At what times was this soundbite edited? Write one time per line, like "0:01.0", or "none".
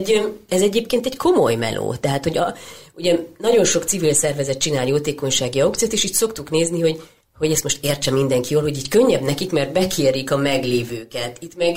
none